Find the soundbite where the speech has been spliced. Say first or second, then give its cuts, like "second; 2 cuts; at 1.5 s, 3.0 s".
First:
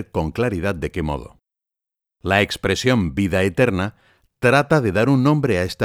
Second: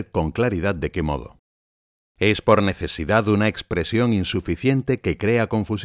second; 1 cut; at 2.0 s